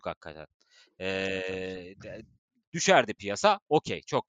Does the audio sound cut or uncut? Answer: cut